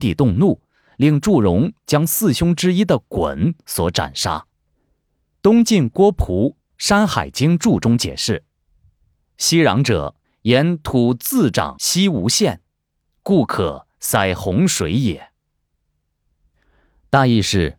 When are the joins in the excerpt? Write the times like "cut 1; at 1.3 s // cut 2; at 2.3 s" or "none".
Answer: none